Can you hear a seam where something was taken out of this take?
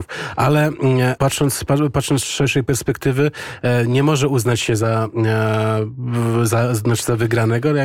yes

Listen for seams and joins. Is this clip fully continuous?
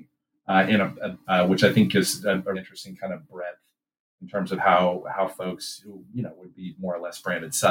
no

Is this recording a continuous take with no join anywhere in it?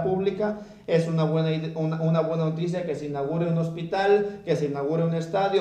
yes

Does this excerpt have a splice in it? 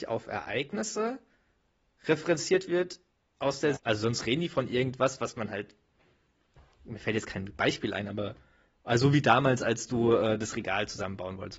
yes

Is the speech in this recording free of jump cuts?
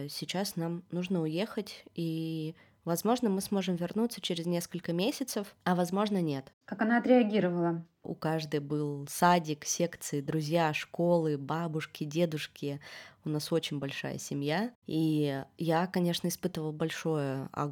no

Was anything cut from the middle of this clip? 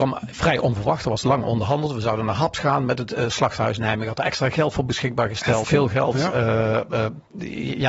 yes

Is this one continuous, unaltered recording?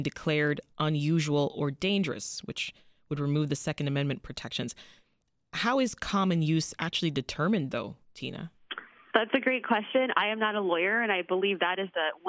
yes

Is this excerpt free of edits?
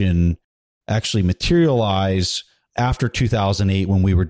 yes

